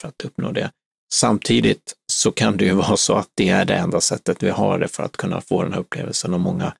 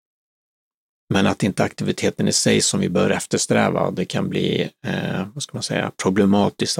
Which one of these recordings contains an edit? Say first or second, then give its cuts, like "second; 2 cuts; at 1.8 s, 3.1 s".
first; 1 cut; at 0.9 s